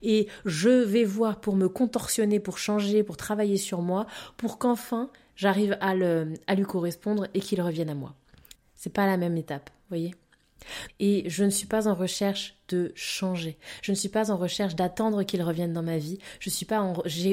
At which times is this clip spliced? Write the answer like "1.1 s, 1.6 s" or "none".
8.6 s, 10.9 s